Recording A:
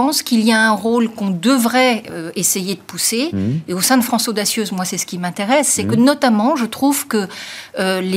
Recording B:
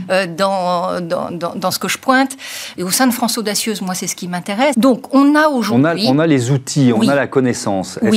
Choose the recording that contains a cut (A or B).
B